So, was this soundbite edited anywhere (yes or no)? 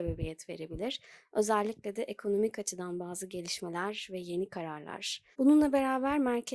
yes